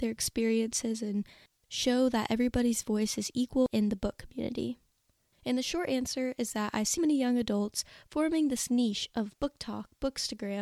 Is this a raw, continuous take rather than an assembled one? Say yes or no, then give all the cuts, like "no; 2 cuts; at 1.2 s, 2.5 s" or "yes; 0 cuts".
no; 2 cuts; at 5.3 s, 7.0 s